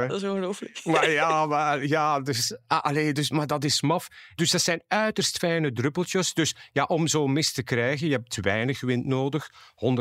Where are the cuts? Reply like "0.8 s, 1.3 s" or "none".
none